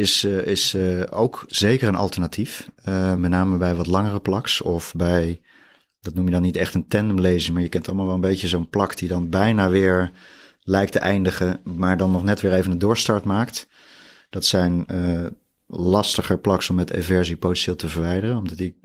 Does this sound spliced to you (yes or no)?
yes